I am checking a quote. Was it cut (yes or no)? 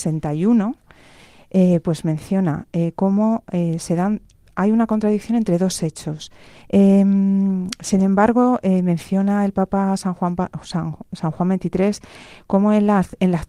yes